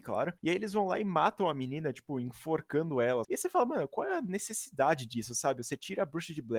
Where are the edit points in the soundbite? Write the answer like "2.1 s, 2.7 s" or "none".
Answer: 3.2 s